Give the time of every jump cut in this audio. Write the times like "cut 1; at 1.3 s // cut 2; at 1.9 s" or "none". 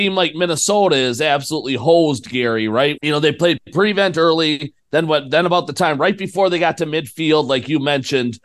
cut 1; at 3.0 s